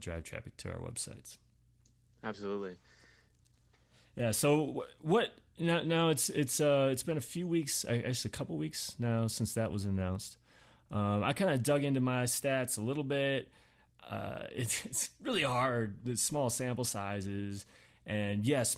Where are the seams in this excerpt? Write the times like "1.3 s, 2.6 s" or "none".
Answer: none